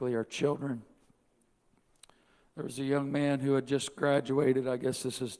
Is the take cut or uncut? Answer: uncut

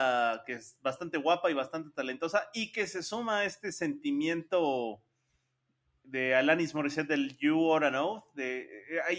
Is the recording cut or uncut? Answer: uncut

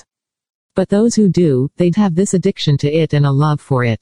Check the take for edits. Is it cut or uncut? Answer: cut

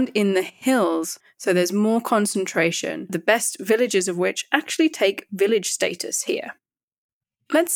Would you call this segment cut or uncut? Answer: uncut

